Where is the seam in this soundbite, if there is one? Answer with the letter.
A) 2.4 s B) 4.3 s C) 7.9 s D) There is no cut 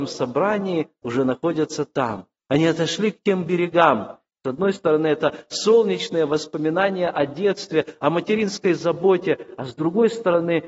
B